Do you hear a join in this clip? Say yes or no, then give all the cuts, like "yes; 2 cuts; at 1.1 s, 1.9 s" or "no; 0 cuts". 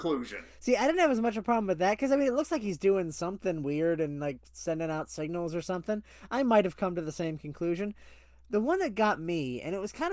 no; 0 cuts